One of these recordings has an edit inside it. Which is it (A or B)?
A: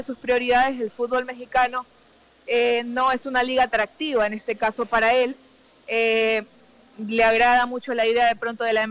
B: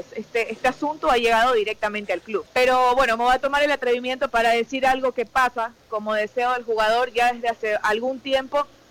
B